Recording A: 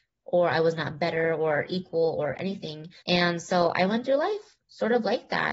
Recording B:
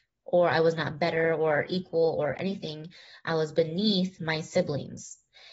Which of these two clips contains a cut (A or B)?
A